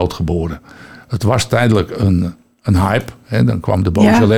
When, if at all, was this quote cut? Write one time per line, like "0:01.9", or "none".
none